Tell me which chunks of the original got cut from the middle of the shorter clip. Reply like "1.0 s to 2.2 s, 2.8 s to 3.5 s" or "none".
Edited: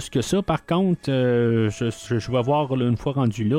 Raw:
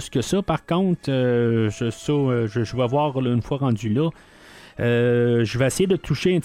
2.0 s to 2.5 s